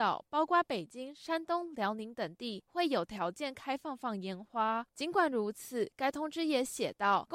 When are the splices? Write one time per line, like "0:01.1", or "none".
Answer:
0:04.9